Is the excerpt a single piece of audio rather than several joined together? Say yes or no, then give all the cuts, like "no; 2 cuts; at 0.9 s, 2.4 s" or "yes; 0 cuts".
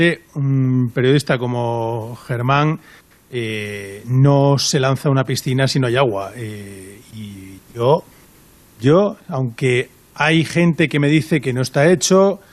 yes; 0 cuts